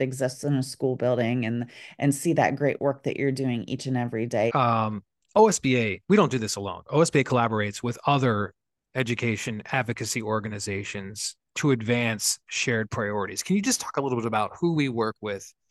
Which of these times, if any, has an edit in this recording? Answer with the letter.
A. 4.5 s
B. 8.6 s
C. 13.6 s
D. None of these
A